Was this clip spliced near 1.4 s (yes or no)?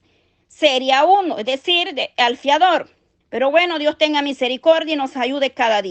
no